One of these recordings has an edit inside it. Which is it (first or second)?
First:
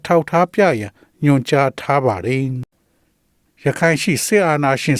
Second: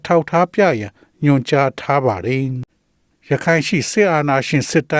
second